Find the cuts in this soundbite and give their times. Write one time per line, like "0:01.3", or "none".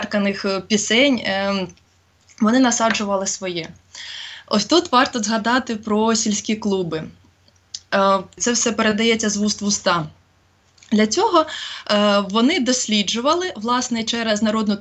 0:08.4